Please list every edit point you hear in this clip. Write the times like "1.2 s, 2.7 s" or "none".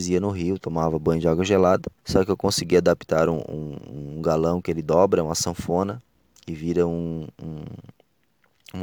2.0 s